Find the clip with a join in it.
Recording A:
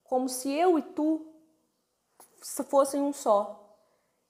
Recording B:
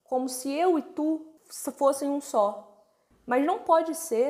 B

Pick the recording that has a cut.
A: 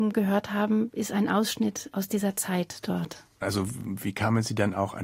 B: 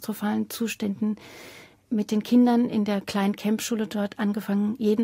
A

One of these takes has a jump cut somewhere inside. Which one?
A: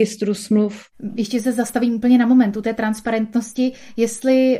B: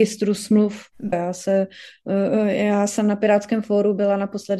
B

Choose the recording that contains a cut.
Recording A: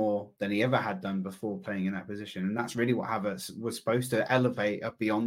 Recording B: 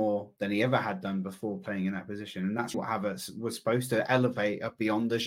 B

